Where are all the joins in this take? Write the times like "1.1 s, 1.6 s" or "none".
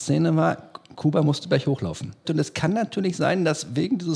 2.2 s